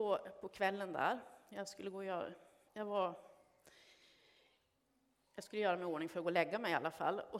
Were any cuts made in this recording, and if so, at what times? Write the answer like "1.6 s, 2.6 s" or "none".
2.7 s